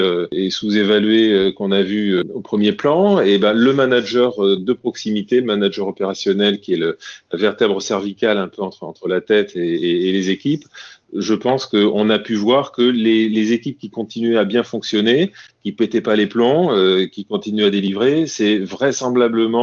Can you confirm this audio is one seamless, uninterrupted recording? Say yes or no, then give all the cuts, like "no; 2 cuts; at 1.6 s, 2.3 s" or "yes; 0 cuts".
yes; 0 cuts